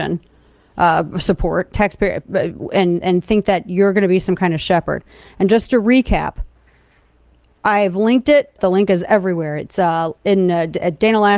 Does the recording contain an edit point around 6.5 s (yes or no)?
no